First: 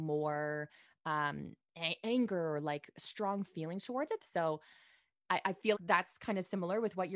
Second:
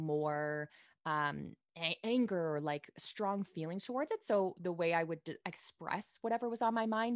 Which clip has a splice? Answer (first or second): first